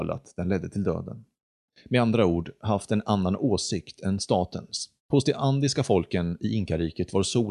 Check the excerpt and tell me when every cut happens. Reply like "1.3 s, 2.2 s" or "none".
1.6 s, 5.0 s